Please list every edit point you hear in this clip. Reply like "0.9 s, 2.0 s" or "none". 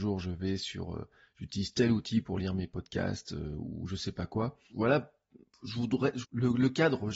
4.7 s, 6.2 s